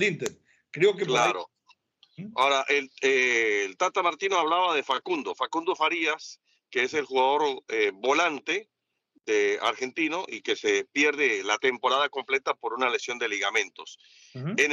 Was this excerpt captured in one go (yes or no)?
yes